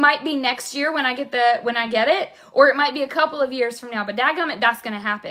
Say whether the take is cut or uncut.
uncut